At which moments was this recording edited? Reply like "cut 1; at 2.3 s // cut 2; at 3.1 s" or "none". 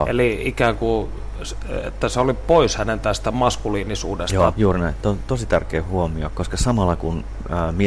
cut 1; at 4.5 s // cut 2; at 6.3 s

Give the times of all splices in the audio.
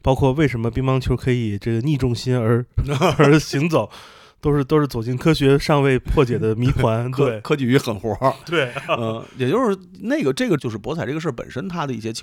cut 1; at 10.6 s

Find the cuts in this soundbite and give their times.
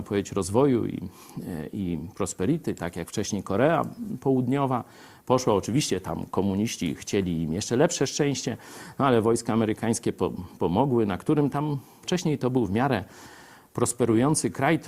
cut 1; at 12.0 s

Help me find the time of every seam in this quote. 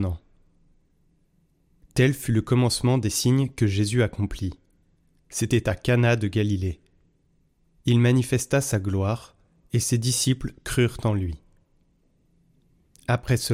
none

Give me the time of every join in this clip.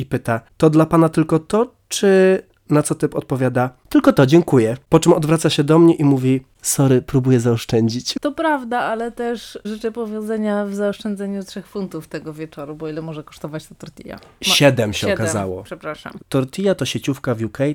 cut 1; at 8.1 s // cut 2; at 16.2 s

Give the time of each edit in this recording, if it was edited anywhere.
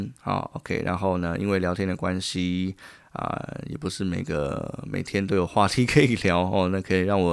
none

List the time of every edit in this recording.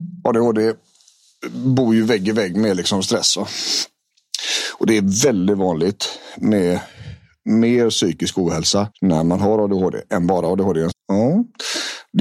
cut 1; at 8.9 s // cut 2; at 10.9 s

